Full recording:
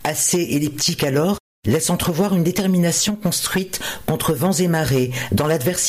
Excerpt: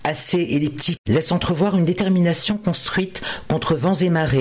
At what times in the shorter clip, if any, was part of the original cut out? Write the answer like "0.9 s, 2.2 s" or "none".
1.0 s